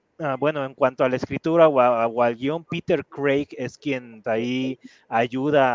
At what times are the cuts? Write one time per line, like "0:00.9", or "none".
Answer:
0:04.2